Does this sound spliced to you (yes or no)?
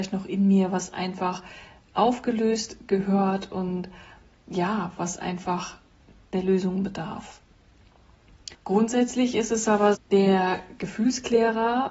yes